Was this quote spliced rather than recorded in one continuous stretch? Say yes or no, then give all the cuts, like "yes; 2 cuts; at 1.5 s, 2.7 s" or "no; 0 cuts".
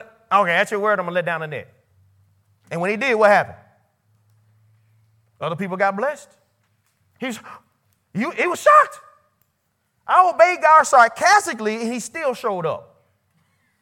no; 0 cuts